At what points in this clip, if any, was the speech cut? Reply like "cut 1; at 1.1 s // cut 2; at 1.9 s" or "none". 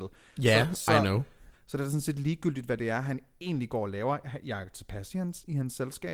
cut 1; at 1.5 s

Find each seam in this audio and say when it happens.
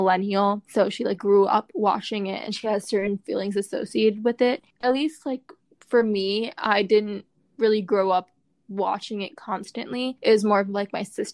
cut 1; at 4.8 s

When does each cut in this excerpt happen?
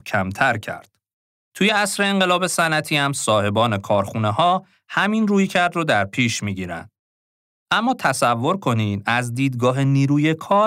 cut 1; at 1.5 s

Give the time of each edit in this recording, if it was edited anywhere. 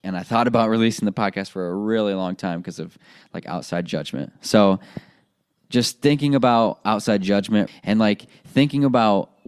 cut 1; at 7.7 s

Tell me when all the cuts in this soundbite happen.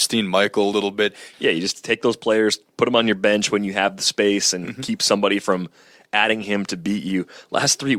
cut 1; at 1.3 s

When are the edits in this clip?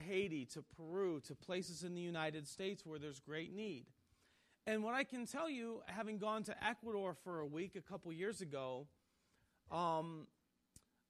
none

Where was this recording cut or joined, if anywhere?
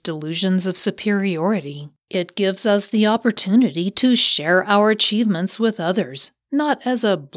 cut 1; at 2.0 s

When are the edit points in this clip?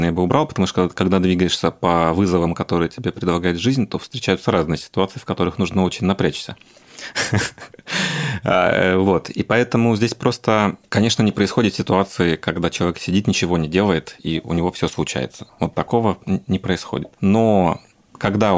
none

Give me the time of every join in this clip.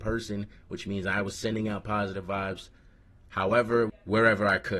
cut 1; at 3.9 s

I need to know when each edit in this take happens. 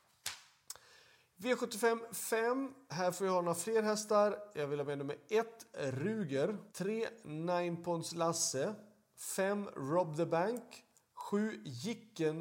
cut 1; at 6.7 s

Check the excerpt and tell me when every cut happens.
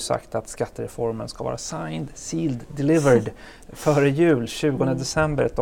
none

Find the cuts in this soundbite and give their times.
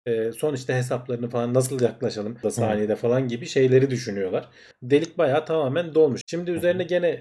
cut 1; at 2.4 s // cut 2; at 4.7 s // cut 3; at 6.2 s

